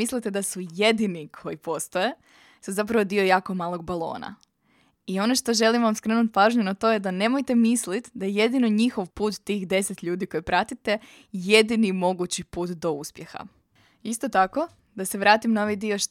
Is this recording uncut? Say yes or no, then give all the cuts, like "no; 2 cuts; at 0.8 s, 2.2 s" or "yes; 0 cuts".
no; 1 cut; at 9.1 s